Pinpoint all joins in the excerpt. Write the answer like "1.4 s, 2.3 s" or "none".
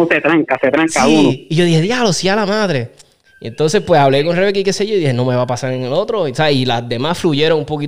none